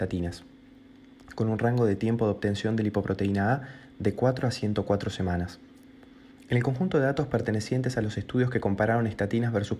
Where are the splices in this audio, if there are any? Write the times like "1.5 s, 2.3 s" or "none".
6.4 s